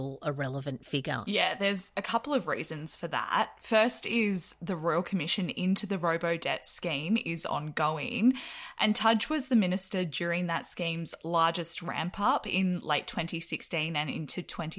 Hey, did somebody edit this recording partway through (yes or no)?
no